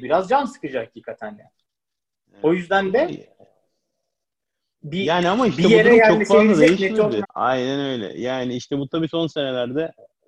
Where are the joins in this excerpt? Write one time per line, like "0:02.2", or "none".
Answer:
0:07.2